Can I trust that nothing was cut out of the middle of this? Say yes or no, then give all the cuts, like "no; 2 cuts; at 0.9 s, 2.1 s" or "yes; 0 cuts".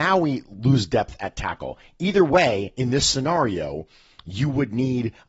yes; 0 cuts